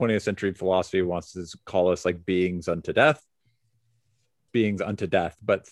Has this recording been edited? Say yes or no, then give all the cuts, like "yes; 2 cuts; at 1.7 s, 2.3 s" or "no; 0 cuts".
yes; 1 cut; at 4.5 s